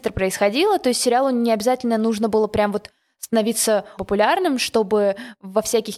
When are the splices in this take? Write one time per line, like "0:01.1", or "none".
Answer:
0:04.0